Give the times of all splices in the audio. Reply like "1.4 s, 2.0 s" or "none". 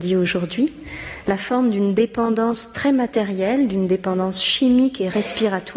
none